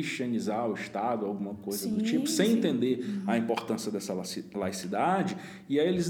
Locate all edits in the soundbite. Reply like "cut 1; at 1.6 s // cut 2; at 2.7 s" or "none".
none